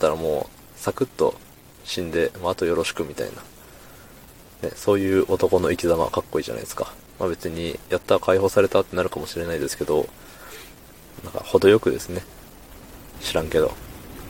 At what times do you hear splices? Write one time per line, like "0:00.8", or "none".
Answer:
0:07.1
0:13.1